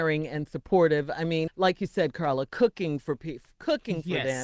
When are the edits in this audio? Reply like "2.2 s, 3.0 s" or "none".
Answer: 1.5 s